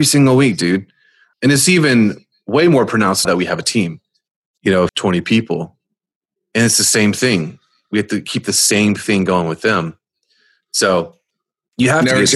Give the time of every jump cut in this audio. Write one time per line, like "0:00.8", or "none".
0:03.2
0:04.9